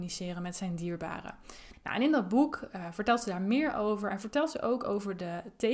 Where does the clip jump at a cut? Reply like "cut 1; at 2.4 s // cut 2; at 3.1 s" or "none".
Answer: cut 1; at 1.7 s